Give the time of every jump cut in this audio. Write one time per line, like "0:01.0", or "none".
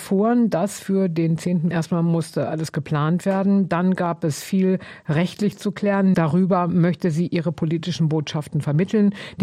0:01.7
0:06.1